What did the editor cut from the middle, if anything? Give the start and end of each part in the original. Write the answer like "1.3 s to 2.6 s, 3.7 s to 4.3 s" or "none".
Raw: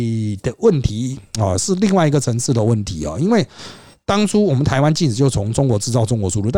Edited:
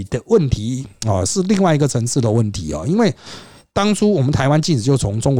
none